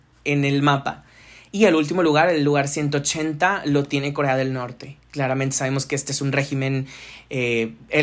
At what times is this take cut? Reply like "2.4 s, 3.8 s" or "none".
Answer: none